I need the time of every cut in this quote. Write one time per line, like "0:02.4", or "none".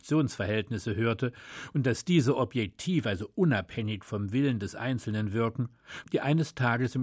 0:06.0